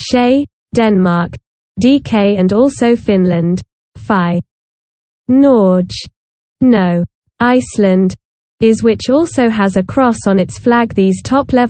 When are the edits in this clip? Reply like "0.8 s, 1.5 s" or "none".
none